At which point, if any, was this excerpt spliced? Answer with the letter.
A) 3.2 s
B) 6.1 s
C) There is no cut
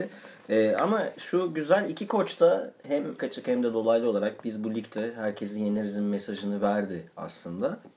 A